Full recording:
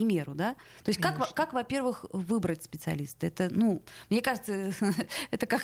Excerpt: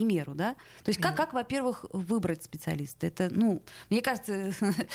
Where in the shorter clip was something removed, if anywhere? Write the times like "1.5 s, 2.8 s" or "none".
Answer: 1.1 s

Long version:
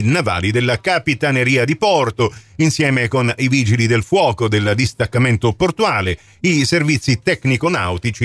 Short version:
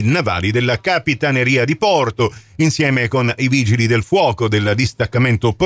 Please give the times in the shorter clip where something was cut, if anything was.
none

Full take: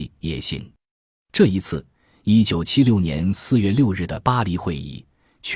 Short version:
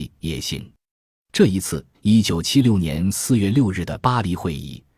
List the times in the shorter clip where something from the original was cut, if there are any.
1.9 s

